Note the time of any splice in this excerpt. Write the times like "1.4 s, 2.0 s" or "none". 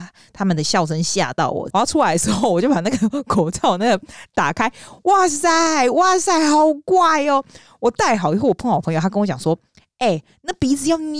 1.7 s